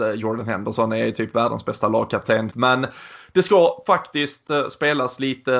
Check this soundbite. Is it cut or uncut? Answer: cut